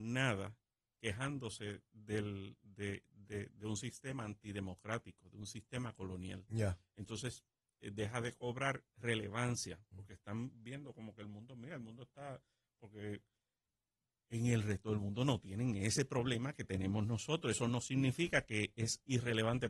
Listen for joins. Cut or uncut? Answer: uncut